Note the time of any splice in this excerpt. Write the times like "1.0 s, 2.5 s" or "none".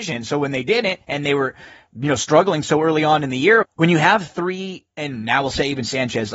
3.6 s, 4.9 s